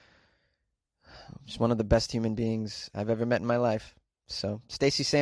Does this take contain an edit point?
no; 0 cuts

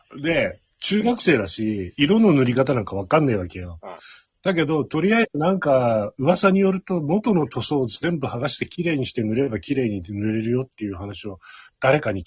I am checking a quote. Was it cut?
no; 0 cuts

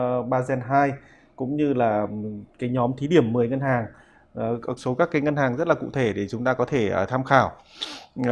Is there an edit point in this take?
yes; 1 cut; at 4.8 s

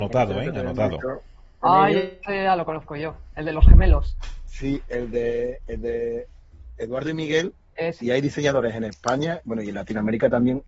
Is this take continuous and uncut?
no; 1 cut; at 8.0 s

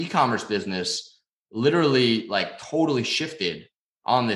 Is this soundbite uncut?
yes; 0 cuts

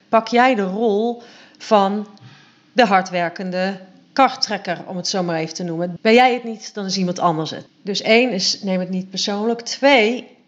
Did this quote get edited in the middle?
yes; 2 cuts; at 6.0 s, 7.7 s

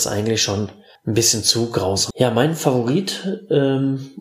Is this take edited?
yes; 1 cut; at 2.1 s

